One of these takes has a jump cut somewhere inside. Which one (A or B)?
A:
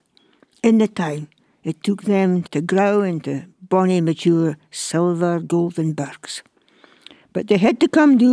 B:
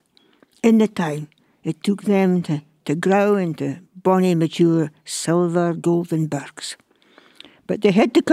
A